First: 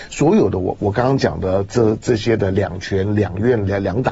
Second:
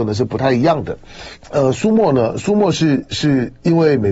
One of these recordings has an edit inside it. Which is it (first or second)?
second